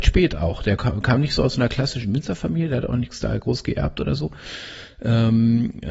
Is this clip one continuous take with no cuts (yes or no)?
yes